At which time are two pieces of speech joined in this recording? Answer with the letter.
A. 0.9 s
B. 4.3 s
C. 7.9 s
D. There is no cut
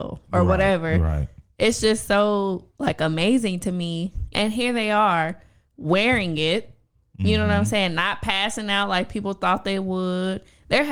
B